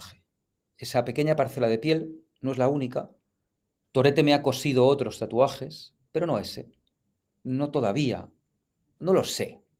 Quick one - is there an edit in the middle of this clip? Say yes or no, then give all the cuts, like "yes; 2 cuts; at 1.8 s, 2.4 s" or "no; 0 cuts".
yes; 1 cut; at 3.8 s